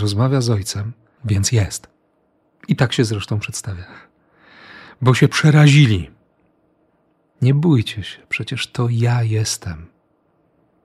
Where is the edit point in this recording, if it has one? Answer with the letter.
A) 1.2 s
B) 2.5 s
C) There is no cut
A